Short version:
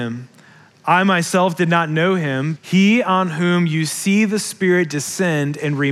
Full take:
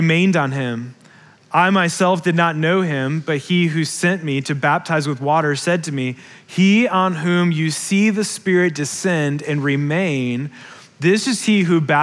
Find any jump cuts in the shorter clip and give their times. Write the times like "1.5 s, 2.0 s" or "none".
2.6 s